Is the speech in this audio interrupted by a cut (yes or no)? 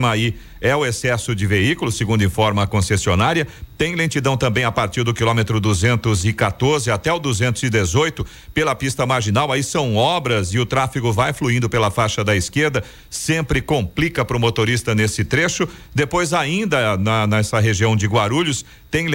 no